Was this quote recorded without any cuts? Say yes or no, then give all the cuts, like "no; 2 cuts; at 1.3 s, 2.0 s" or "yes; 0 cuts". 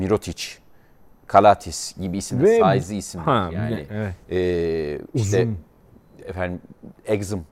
yes; 0 cuts